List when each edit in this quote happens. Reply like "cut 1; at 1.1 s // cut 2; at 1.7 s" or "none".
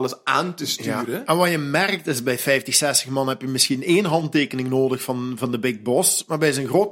none